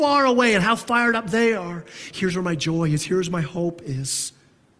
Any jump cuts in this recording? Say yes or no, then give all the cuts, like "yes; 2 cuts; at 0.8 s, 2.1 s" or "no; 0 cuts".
yes; 1 cut; at 2.1 s